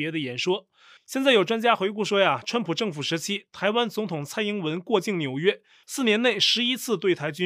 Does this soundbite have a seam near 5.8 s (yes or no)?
yes